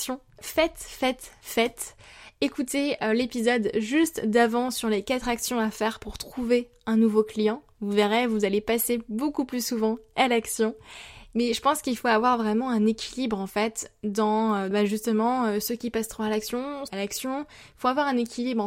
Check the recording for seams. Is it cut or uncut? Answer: cut